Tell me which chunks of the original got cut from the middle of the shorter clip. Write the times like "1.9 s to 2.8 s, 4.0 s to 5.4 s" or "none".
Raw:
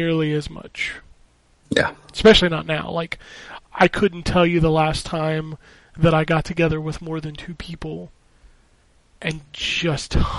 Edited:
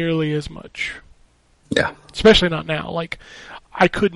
none